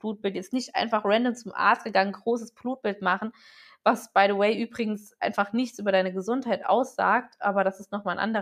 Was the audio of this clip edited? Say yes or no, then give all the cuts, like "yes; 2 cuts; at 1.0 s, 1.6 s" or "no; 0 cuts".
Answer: no; 0 cuts